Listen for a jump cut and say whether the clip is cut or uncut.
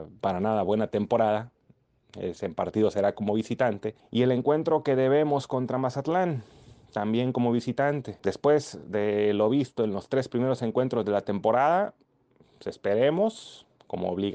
uncut